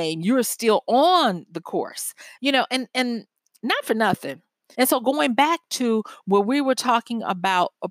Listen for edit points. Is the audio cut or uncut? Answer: cut